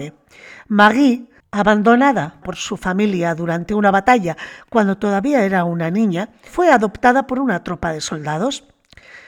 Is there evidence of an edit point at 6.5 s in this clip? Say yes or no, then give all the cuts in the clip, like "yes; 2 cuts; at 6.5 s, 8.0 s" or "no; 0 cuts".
yes; 1 cut; at 6.5 s